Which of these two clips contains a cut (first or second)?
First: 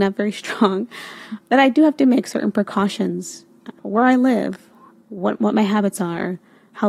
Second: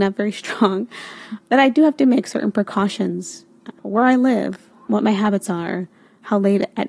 second